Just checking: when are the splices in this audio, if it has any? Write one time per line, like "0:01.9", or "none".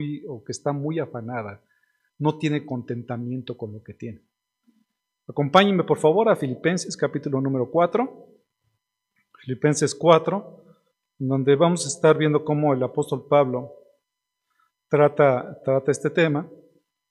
none